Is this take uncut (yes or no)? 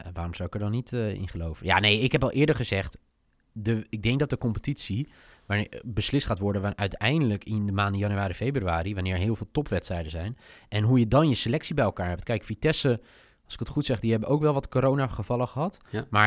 yes